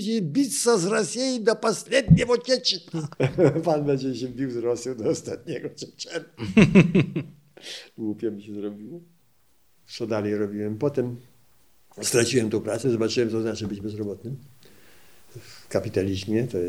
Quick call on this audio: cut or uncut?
cut